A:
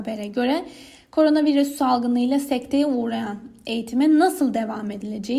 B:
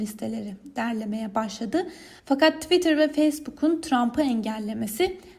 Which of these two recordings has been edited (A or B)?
B